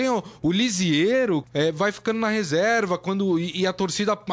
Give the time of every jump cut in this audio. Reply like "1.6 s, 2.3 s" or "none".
1.4 s